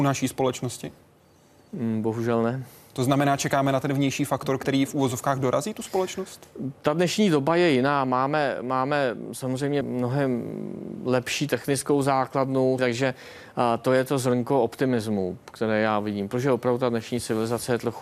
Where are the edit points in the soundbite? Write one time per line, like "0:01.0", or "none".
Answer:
0:09.8
0:12.8